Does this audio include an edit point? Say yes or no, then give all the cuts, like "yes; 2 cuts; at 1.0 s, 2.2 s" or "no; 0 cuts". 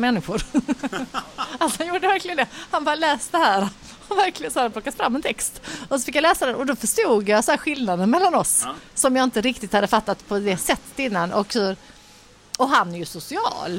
no; 0 cuts